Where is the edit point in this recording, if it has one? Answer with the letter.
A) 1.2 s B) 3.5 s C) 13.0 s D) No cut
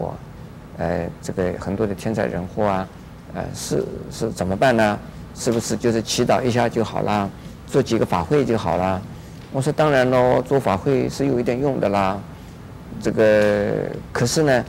D